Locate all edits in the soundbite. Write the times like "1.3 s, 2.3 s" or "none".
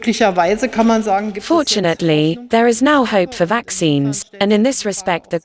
none